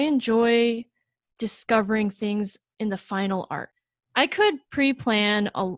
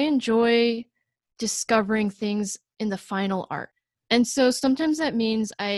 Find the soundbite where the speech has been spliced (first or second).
second